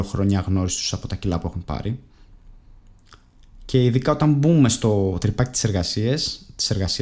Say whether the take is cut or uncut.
uncut